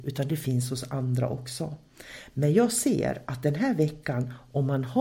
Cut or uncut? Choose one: uncut